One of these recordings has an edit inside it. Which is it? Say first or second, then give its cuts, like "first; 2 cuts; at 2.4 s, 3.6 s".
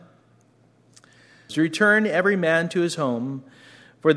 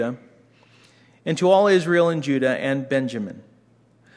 first; 1 cut; at 1.5 s